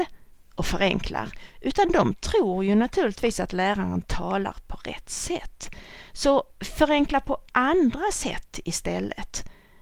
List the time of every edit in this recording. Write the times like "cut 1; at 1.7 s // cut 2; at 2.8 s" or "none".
none